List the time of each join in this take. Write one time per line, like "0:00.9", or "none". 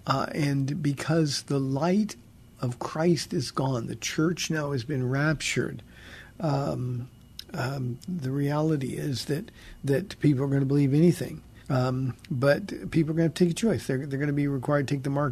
0:11.6

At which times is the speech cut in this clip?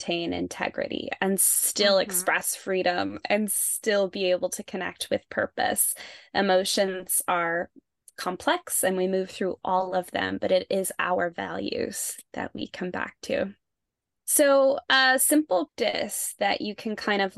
0:14.2
0:15.7

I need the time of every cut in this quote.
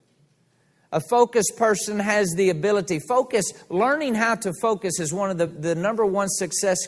none

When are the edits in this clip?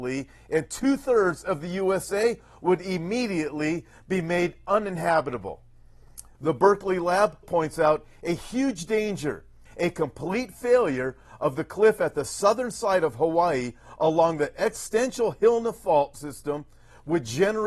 0:06.3
0:07.4
0:09.7

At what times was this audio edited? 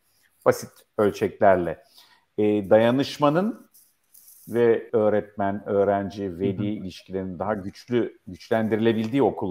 0:04.9

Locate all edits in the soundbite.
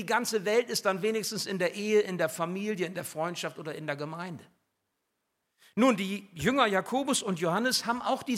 none

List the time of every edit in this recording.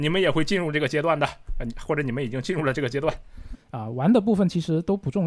0:03.5

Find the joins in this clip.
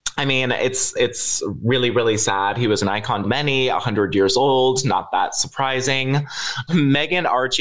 0:03.2
0:06.7

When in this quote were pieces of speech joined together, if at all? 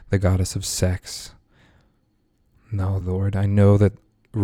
0:03.0

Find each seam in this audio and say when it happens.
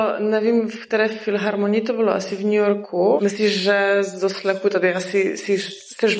0:03.2

